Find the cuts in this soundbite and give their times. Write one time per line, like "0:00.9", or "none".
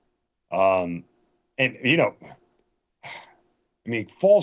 none